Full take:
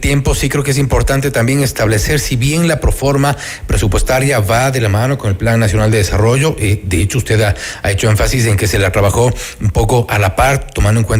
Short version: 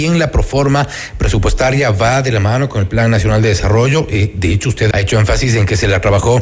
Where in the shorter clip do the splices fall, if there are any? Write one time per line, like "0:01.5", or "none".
0:04.9